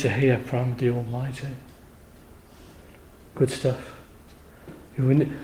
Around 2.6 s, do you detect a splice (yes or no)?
no